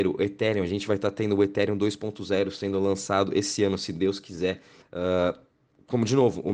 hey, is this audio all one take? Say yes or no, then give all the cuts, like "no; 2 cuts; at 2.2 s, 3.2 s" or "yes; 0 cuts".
no; 1 cut; at 4.8 s